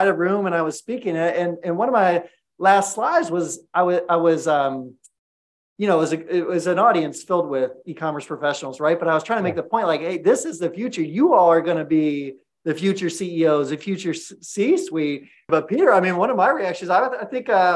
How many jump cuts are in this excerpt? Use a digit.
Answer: 1